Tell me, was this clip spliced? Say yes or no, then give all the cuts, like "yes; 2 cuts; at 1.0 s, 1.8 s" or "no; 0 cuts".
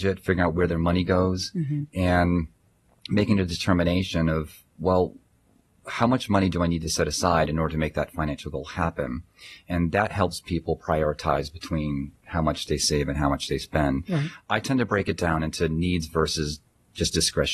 no; 0 cuts